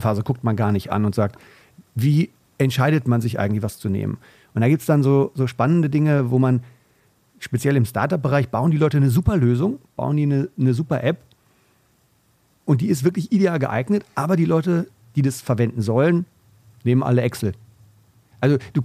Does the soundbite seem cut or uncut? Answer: uncut